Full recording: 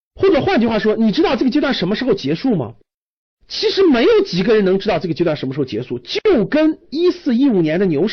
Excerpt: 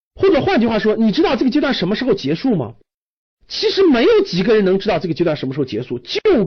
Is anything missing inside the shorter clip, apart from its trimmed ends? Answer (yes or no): no